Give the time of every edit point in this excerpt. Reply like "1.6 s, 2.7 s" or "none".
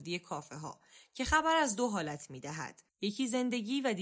2.9 s